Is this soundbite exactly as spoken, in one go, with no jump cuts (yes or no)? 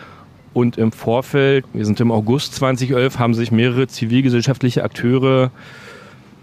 no